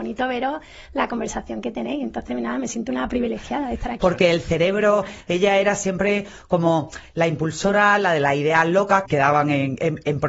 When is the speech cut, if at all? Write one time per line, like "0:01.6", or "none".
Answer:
0:04.0
0:09.0